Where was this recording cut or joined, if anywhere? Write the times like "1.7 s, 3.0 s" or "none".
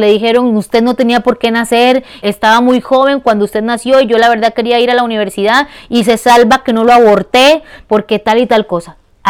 2.2 s